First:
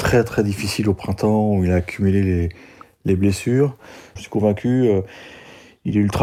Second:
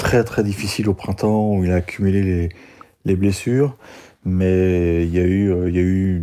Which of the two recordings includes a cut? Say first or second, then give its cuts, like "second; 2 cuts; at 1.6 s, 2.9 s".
first; 1 cut; at 4.2 s